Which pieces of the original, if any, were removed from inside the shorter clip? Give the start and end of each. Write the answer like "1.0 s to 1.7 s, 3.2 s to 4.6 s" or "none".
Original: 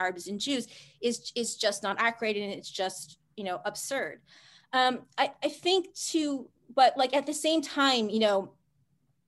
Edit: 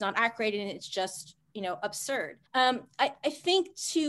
4.3 s to 4.6 s